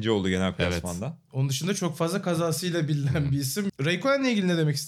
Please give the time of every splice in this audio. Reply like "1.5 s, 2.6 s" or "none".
3.7 s